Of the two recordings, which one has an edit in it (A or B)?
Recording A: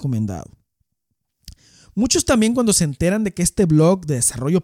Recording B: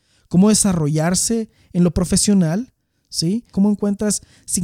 B